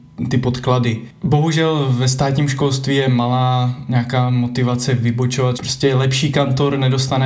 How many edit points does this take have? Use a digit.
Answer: 1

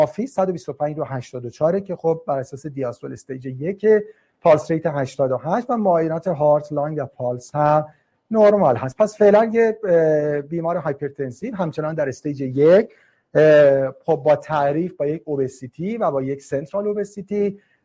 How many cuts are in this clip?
0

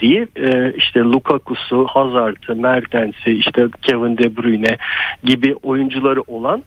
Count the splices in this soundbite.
0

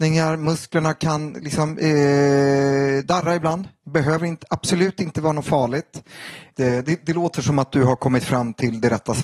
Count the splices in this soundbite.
1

